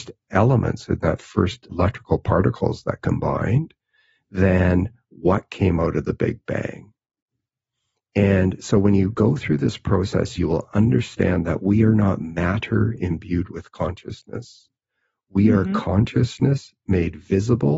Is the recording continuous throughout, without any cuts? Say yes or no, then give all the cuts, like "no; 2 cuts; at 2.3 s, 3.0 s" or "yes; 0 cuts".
no; 2 cuts; at 1.7 s, 10.4 s